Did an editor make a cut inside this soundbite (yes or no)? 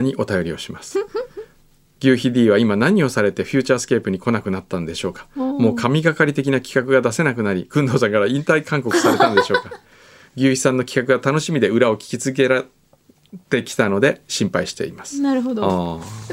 no